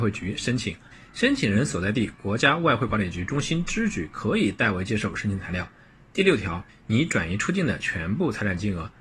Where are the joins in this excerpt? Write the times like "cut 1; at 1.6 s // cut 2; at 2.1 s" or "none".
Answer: cut 1; at 0.9 s // cut 2; at 6.7 s